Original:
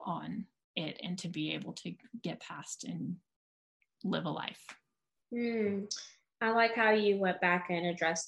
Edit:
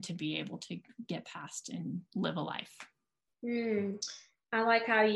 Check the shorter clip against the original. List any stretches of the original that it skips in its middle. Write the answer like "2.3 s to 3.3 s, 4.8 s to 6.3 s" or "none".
3.2 s to 3.9 s